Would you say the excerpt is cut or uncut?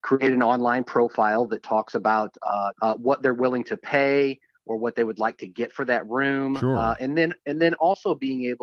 cut